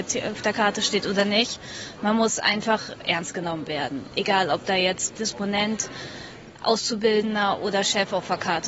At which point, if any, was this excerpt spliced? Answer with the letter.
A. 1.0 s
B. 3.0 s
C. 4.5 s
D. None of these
B